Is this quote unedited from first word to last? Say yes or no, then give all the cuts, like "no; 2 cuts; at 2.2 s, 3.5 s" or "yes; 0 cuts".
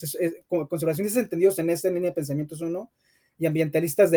yes; 0 cuts